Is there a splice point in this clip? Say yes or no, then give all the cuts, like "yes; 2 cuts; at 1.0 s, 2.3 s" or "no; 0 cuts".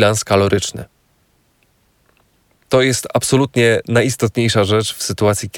no; 0 cuts